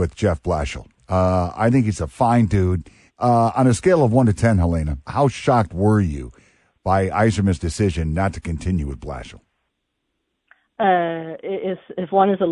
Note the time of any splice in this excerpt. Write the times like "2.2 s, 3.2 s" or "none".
3.1 s, 5.0 s